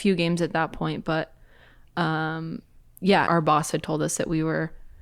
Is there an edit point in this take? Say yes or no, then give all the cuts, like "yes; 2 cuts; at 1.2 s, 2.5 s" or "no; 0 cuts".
yes; 1 cut; at 3.3 s